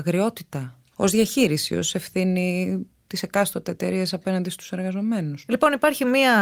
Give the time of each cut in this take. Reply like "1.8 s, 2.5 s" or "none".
0.9 s